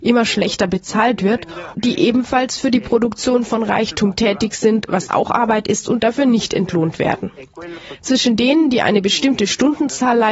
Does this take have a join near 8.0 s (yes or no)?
yes